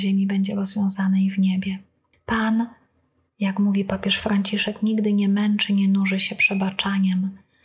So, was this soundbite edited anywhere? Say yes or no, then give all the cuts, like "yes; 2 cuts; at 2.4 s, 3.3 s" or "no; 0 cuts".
no; 0 cuts